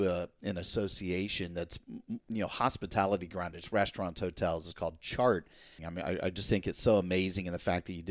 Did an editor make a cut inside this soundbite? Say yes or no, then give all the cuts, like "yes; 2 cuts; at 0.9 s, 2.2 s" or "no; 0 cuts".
yes; 1 cut; at 5.8 s